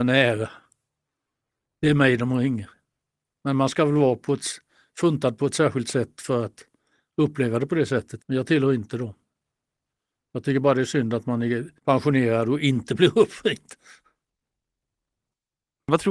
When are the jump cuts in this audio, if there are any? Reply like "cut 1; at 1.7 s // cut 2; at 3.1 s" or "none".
cut 1; at 8.2 s // cut 2; at 11.8 s